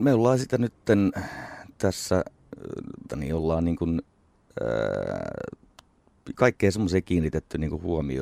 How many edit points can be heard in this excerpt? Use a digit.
2